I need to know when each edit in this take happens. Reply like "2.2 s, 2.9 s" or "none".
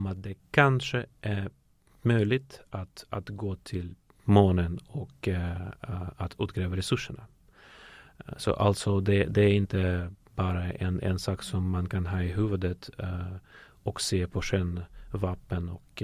none